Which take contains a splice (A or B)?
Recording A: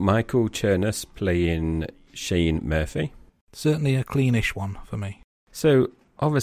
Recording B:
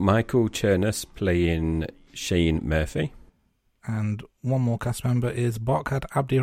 A